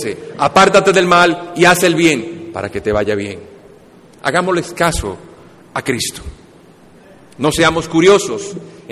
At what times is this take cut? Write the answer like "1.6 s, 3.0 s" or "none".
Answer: 4.7 s